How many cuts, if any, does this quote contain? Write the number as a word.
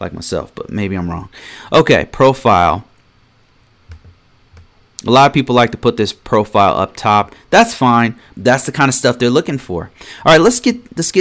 one